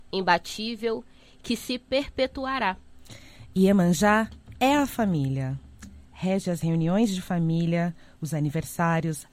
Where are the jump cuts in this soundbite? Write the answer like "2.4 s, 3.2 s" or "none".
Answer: none

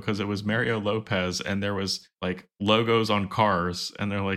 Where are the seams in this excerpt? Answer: 2.1 s

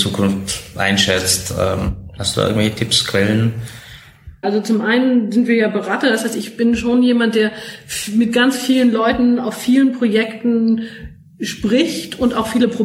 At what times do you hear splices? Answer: 4.4 s

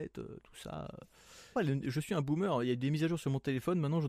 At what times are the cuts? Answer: 1.6 s

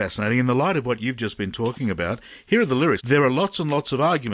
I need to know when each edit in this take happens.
3.0 s

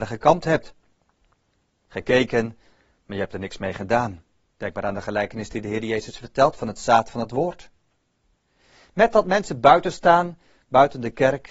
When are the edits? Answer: 1.9 s, 4.6 s

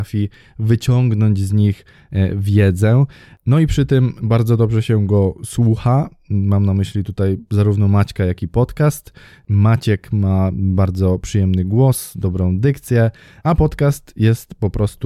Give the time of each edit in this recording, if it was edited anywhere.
none

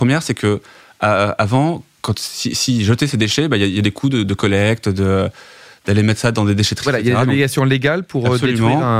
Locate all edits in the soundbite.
none

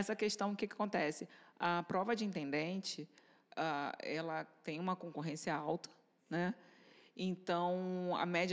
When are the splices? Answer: none

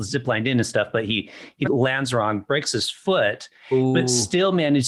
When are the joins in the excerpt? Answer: 1.7 s

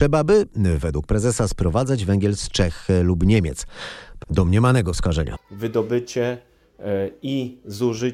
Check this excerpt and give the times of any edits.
4.2 s, 5.3 s

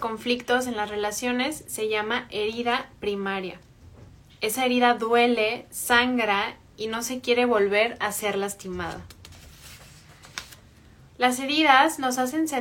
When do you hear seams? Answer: 11.1 s

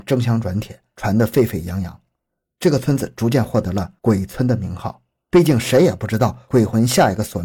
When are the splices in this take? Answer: 5.3 s

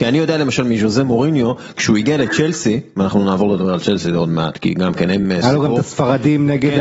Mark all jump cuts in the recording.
none

